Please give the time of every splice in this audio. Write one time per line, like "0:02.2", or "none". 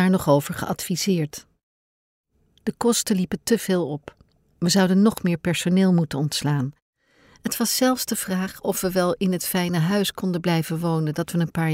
0:02.5